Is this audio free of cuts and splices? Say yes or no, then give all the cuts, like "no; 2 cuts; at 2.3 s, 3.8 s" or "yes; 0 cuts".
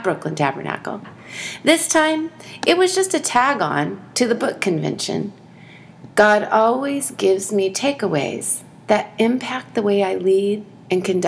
yes; 0 cuts